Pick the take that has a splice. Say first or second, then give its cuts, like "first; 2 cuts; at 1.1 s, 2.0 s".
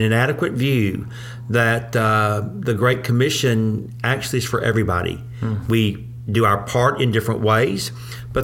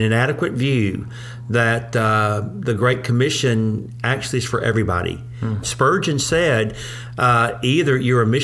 second; 1 cut; at 5.6 s